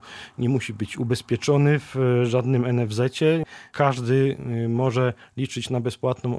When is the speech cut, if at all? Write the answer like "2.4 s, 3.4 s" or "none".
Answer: none